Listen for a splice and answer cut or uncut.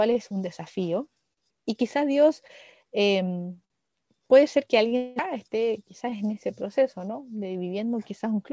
cut